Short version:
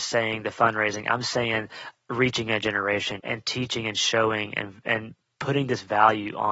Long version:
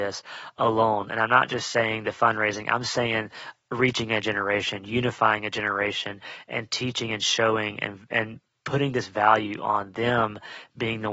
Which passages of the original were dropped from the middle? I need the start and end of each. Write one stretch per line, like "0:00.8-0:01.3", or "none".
0:04.8-0:06.5